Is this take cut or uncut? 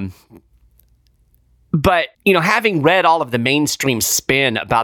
cut